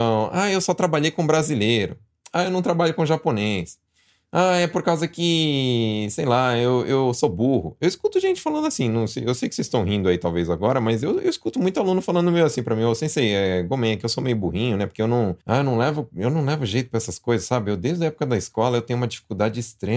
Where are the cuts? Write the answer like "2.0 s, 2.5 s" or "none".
15.4 s